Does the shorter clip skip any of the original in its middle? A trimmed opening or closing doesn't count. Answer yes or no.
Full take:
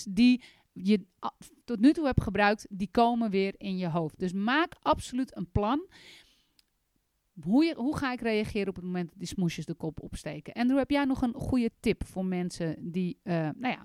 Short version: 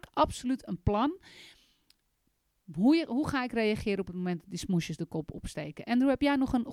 no